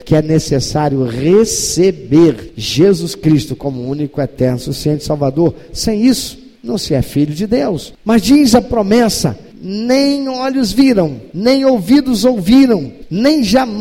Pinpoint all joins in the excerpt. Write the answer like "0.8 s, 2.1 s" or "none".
none